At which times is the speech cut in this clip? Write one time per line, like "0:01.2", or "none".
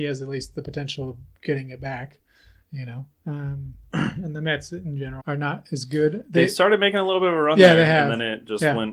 0:05.2